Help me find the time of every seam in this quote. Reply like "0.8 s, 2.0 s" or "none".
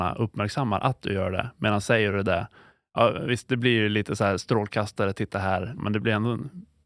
5.8 s

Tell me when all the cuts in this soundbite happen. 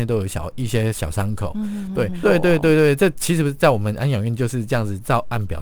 2.2 s

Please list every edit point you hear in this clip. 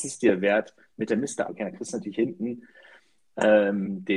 1.5 s

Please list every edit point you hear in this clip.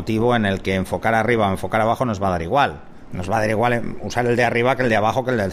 3.1 s

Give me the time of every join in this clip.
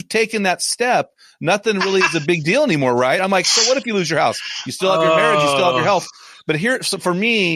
none

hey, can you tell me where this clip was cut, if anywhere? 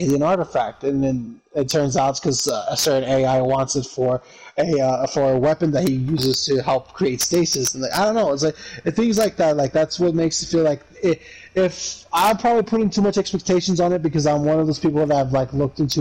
none

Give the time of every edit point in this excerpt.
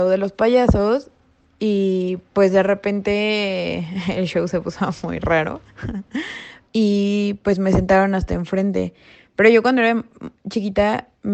6.6 s

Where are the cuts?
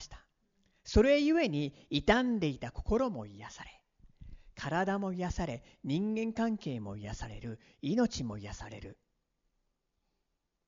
none

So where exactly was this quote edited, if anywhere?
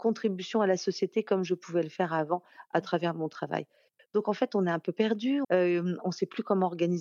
4.0 s, 5.4 s

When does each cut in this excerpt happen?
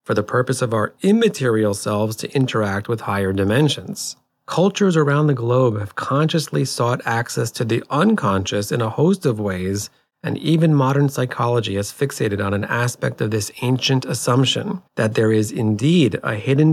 4.3 s, 14.9 s

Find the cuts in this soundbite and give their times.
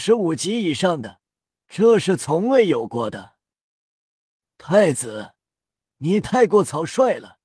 1.6 s

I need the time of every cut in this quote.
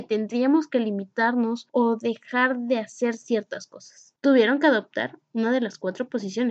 4.2 s

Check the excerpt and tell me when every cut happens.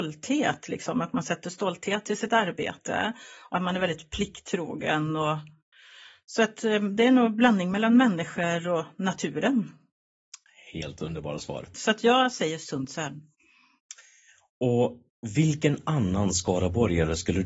11.7 s

